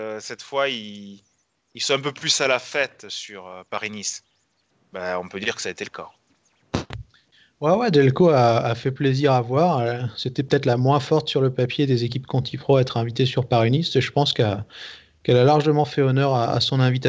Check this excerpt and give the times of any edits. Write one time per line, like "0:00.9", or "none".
none